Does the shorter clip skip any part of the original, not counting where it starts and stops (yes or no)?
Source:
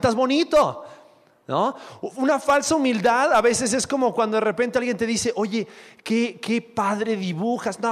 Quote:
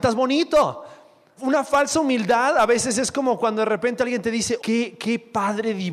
yes